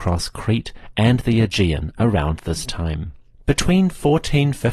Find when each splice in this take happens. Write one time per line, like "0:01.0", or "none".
none